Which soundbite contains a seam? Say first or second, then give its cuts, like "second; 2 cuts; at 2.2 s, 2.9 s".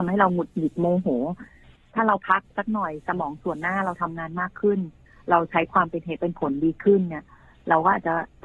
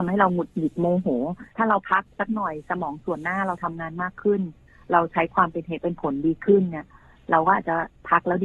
second; 1 cut; at 1.5 s